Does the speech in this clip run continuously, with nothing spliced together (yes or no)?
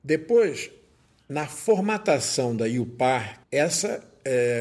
no